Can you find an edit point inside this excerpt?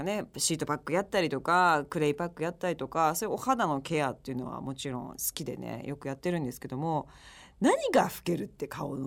no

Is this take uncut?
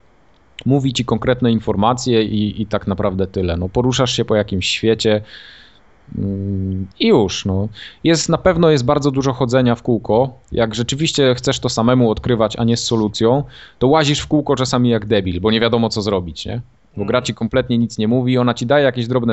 no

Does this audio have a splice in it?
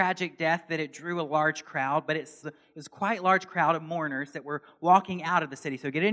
yes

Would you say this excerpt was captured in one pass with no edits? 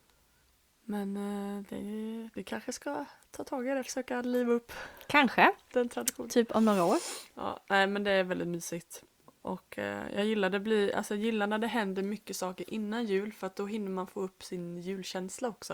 yes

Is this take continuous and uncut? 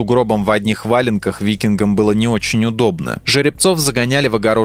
no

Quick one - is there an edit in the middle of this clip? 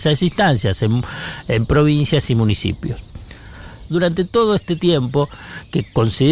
yes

